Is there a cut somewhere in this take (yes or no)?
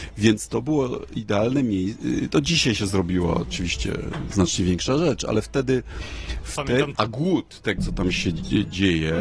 yes